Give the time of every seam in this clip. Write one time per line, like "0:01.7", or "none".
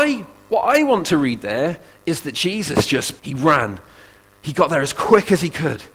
0:03.2